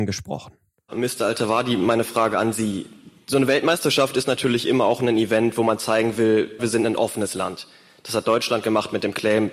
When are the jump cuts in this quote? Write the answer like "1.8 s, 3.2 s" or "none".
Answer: 6.6 s

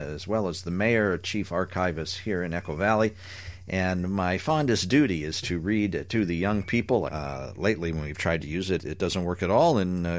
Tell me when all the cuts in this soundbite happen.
7.1 s, 8.8 s

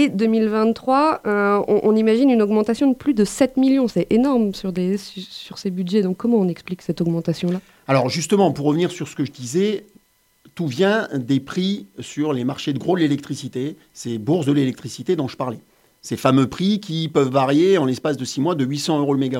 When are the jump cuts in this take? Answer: none

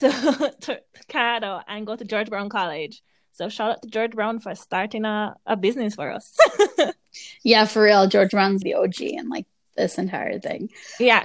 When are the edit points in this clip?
8.6 s

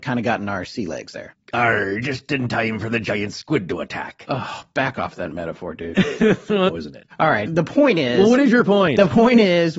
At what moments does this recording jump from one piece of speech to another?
6.7 s

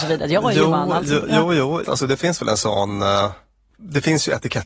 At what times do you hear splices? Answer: 1.8 s

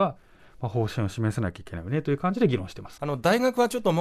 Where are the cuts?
3.0 s

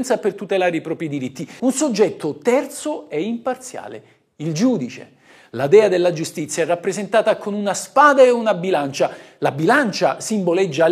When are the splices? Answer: 1.6 s

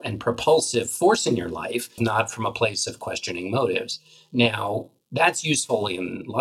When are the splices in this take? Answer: 2.0 s

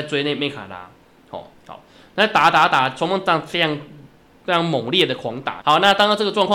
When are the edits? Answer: 1.5 s, 5.6 s

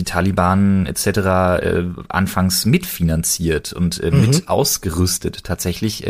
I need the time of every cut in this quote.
none

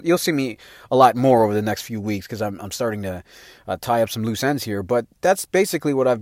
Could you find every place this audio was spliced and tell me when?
none

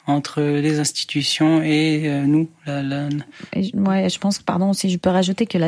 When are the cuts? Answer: none

